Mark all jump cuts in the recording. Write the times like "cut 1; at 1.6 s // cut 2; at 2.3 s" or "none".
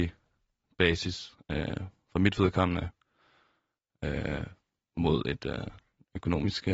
none